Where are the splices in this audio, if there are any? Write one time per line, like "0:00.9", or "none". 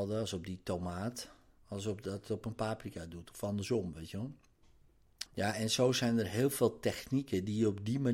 0:05.3